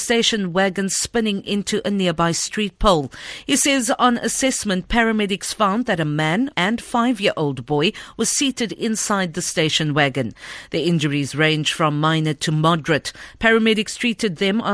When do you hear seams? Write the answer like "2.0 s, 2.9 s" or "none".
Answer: 6.5 s